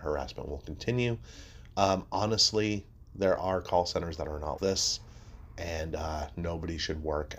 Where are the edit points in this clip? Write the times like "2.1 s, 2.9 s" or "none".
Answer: 4.6 s